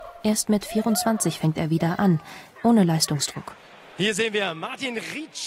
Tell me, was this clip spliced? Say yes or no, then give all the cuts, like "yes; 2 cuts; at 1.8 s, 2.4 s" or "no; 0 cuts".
yes; 1 cut; at 2.6 s